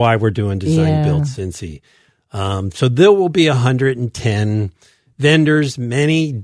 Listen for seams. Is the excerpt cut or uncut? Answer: uncut